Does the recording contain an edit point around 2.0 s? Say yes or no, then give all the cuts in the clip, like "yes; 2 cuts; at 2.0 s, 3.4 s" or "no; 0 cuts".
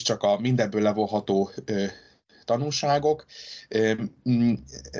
no; 0 cuts